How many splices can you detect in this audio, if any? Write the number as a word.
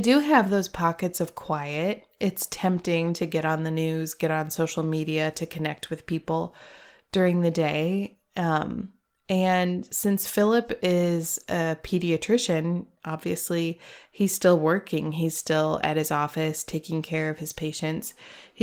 zero